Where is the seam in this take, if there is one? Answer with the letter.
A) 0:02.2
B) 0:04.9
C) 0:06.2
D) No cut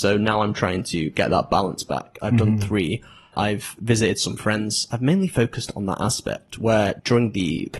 A